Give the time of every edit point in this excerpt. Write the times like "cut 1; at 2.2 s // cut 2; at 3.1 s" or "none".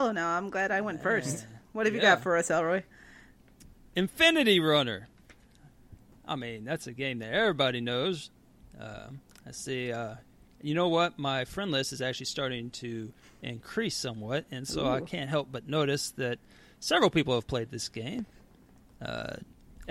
cut 1; at 3.9 s